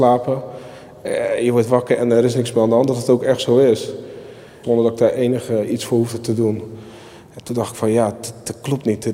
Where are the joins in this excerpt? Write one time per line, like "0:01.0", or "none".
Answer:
0:04.6

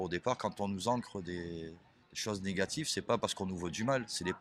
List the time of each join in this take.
none

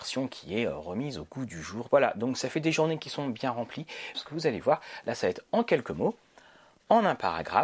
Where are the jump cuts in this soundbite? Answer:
0:01.9
0:04.1

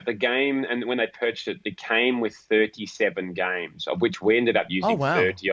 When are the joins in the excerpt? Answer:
none

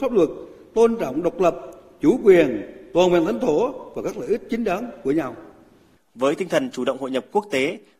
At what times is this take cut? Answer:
0:06.0

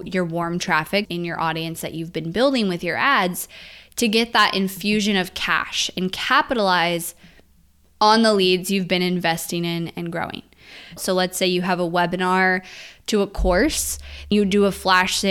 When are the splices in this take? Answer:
0:01.1
0:11.0
0:14.3

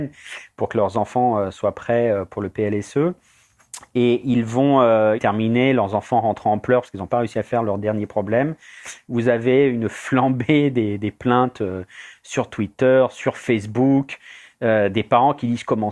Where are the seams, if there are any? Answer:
0:05.2

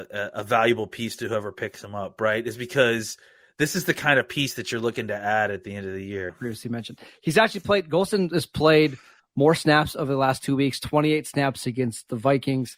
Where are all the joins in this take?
0:06.3

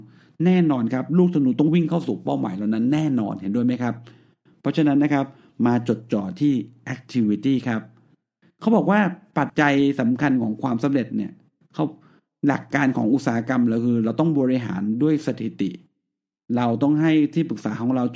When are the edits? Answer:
0:09.5

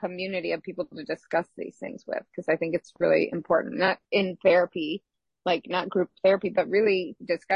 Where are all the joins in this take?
none

